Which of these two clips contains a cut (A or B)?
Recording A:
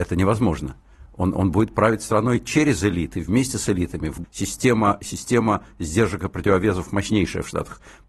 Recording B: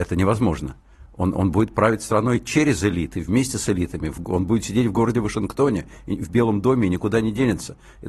A